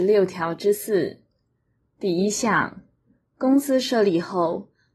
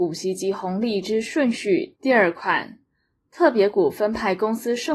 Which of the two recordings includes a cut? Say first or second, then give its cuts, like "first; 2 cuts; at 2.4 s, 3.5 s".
second; 1 cut; at 1.9 s